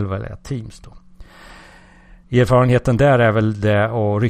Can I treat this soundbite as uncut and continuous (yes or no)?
no